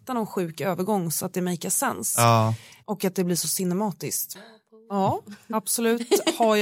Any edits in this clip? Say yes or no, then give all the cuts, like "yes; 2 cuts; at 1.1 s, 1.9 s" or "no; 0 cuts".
yes; 2 cuts; at 2.8 s, 4.4 s